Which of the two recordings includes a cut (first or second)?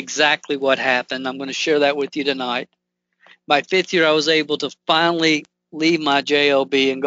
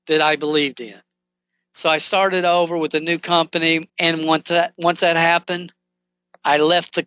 second